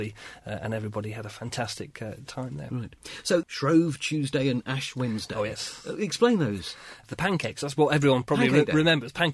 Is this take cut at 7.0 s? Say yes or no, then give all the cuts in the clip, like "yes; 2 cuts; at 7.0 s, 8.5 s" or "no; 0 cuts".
no; 0 cuts